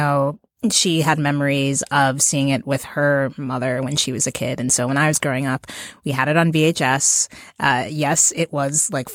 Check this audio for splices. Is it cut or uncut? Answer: uncut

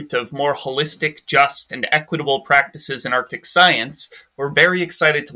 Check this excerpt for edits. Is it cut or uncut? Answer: uncut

